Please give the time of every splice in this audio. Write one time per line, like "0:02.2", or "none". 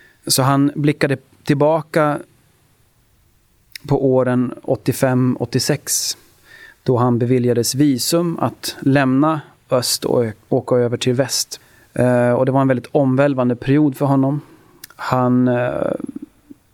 none